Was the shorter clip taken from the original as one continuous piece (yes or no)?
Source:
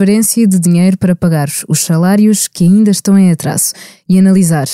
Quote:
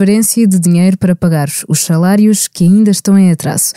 yes